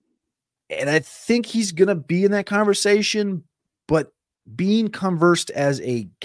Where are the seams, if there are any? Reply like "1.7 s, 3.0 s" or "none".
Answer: none